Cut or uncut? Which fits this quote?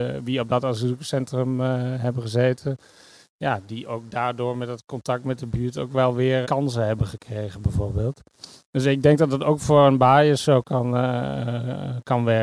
cut